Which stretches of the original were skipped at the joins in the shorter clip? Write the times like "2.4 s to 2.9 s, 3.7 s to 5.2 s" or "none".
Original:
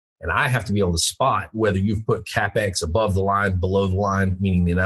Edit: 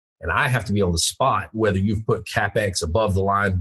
none